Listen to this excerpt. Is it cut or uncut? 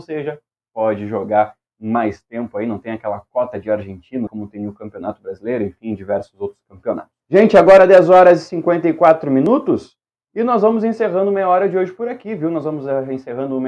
cut